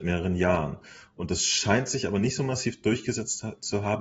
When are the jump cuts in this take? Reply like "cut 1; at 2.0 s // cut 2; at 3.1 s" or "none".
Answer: none